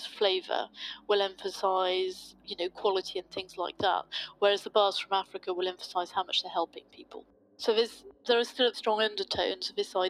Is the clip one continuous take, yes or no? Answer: no